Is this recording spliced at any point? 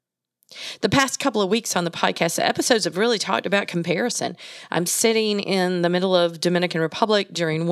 no; 0 cuts

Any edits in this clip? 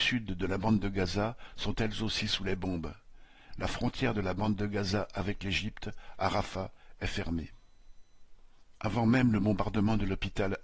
yes; 1 cut; at 3.5 s

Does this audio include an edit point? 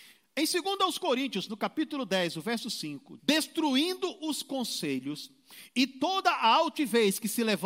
yes; 1 cut; at 3.2 s

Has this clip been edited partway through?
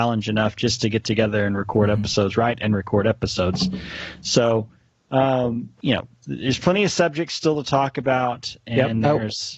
yes; 1 cut; at 5.8 s

